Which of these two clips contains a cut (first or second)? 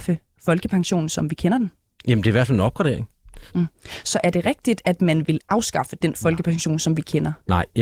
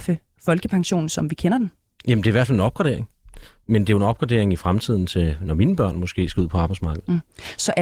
first